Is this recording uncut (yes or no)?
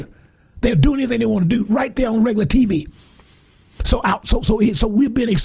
yes